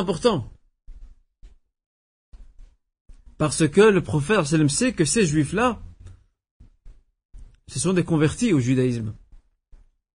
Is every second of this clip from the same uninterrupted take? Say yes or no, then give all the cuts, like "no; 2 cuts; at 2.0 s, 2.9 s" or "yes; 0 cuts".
yes; 0 cuts